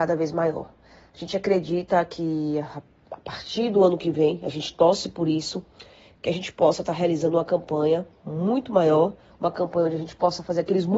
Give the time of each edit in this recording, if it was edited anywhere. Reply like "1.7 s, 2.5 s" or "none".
none